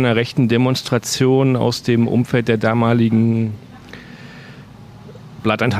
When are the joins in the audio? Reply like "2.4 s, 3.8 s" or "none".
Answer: none